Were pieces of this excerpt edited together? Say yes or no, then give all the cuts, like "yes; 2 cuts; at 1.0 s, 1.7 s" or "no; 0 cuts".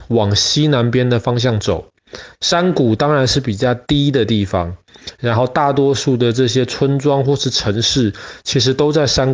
yes; 1 cut; at 2.3 s